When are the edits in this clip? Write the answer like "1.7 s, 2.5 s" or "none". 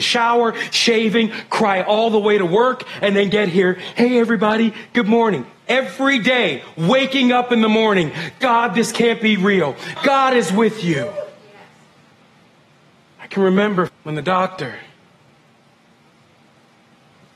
10.0 s, 13.9 s